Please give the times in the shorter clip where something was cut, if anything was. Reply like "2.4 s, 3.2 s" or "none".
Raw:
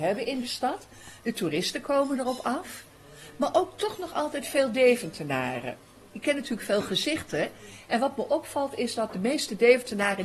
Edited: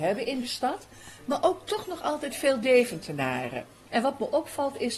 1.2 s, 3.9 s